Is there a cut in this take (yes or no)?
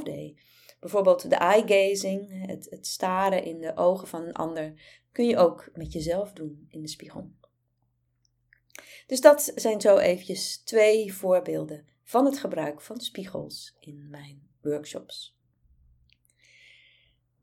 no